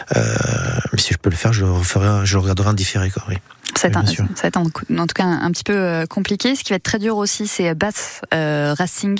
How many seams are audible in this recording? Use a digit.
0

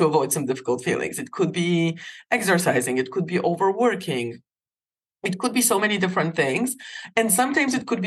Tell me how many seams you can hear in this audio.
0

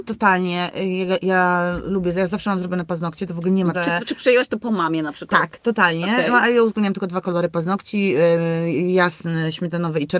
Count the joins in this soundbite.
1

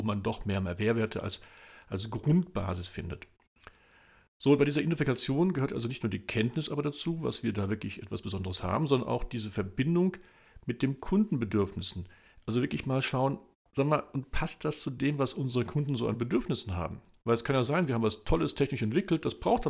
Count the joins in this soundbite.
0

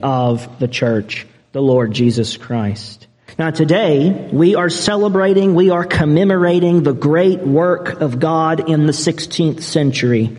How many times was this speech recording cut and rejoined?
1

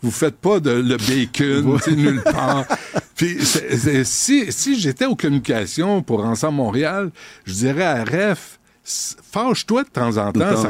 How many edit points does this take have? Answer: 0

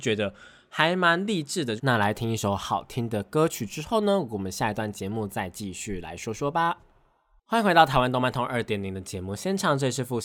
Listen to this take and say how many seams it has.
1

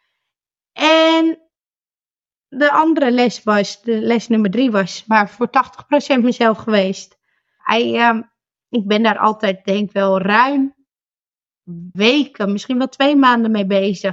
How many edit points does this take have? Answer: 2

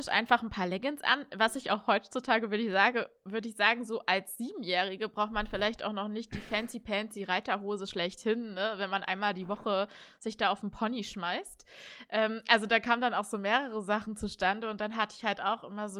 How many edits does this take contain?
0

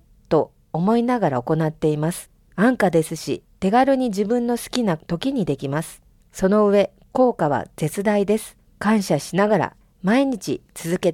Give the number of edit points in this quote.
0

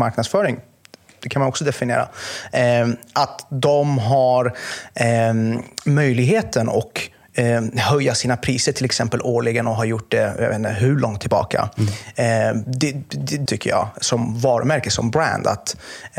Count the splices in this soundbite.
1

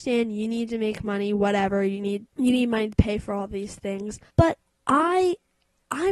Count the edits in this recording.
1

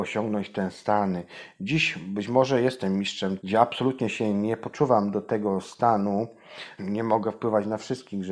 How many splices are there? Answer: 2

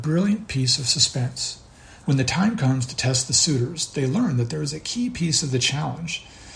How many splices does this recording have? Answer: 1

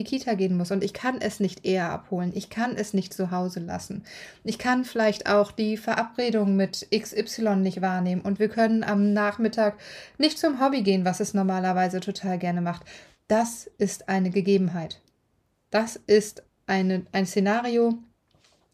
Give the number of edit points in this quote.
0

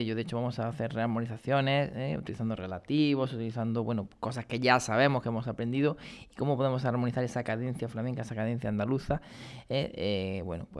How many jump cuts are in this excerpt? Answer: 0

